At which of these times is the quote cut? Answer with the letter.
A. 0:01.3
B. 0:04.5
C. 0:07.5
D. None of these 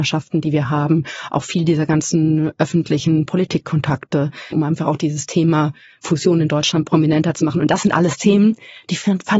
B